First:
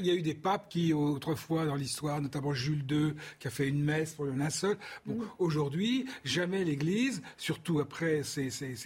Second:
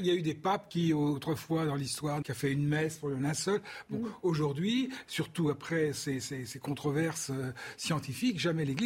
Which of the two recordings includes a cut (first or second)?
second